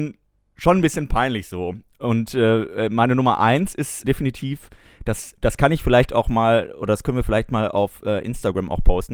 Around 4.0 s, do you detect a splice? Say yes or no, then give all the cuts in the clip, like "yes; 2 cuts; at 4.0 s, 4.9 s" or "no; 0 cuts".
yes; 1 cut; at 4.0 s